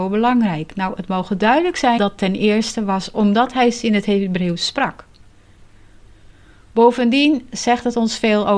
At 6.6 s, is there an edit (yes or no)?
no